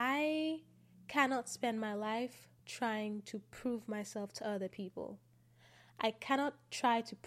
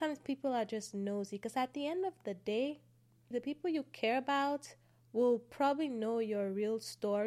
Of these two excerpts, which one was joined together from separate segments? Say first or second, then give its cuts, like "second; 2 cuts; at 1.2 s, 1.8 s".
second; 1 cut; at 3.3 s